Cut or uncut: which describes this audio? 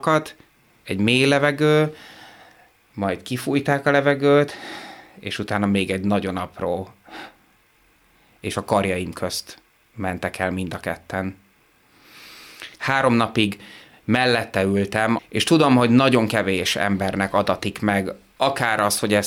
cut